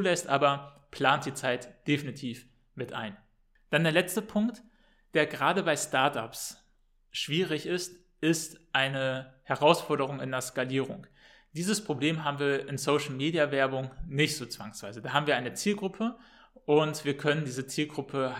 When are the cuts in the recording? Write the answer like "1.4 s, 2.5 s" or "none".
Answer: none